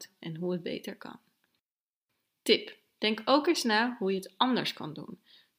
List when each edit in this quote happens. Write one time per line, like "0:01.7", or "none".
none